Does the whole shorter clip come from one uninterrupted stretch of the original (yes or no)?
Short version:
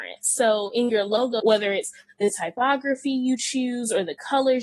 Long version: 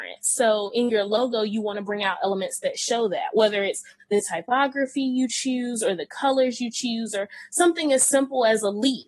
no